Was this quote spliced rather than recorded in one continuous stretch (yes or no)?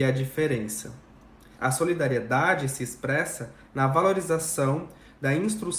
yes